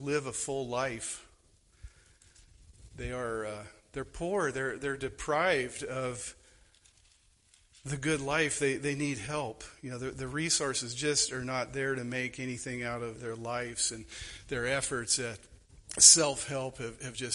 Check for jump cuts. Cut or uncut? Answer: cut